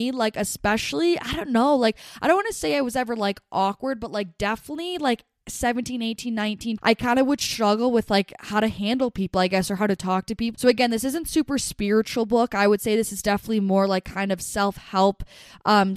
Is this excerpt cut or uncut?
cut